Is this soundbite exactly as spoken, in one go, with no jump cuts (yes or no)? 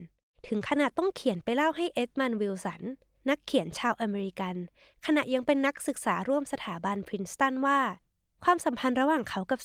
yes